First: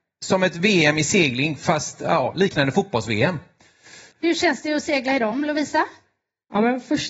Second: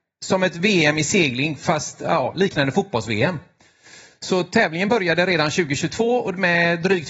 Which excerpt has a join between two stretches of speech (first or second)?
first